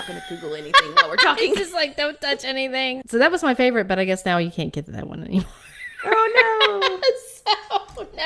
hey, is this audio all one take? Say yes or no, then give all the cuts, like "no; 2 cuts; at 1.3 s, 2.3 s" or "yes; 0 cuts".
no; 1 cut; at 3.0 s